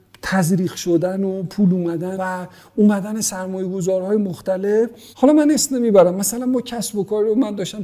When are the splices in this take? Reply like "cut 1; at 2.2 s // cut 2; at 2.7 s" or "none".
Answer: cut 1; at 2.2 s // cut 2; at 5.1 s